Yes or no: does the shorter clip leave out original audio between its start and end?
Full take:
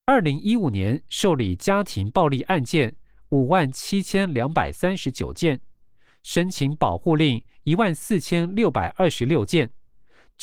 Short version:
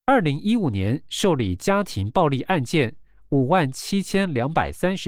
no